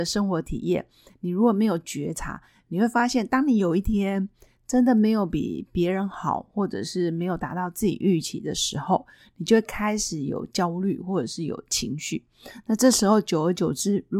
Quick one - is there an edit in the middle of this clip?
no; 0 cuts

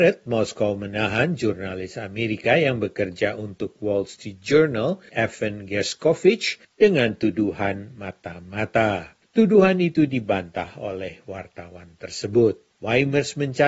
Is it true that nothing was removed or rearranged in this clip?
yes; 0 cuts

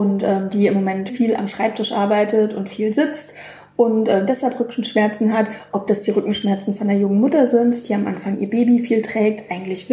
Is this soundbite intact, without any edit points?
no; 1 cut; at 1.1 s

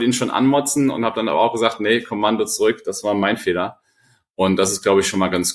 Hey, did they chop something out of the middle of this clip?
no; 0 cuts

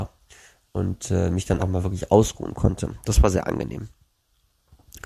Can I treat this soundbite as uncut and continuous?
no; 1 cut; at 1.6 s

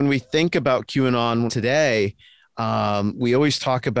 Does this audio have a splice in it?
yes; 1 cut; at 1.5 s

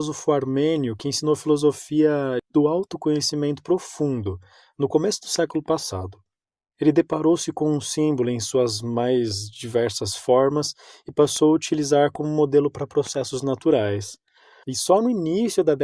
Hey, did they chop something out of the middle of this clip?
yes; 1 cut; at 14.6 s

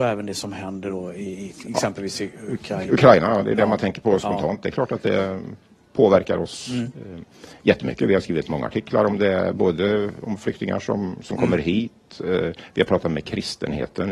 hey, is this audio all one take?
yes; 0 cuts

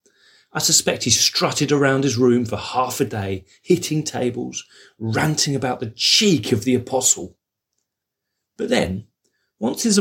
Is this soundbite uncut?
yes; 0 cuts

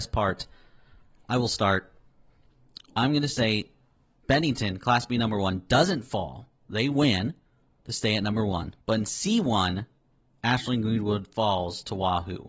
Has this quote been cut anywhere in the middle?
yes; 1 cut; at 8.8 s

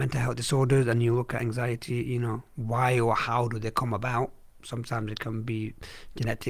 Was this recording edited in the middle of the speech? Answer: no; 0 cuts

